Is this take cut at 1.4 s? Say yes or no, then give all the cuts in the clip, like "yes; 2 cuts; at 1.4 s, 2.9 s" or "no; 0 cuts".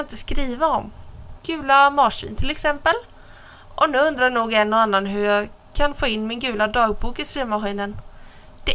yes; 1 cut; at 1.4 s